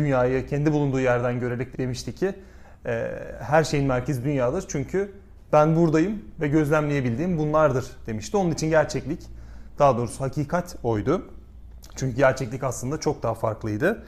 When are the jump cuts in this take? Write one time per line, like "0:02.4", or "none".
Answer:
0:01.7